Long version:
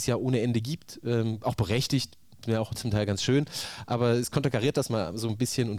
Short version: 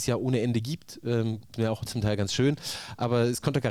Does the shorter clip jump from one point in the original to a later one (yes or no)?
yes